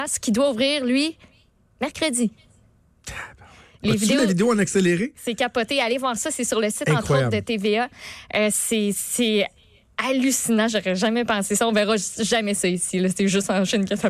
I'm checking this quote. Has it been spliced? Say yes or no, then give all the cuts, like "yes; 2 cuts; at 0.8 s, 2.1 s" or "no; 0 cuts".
no; 0 cuts